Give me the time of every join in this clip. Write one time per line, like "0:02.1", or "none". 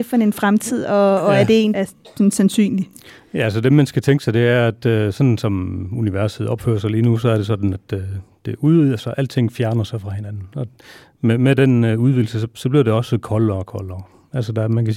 0:01.7

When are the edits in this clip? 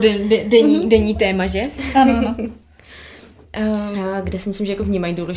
0:03.9

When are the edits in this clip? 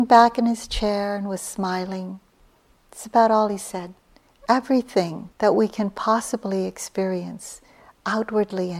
0:04.3
0:05.3

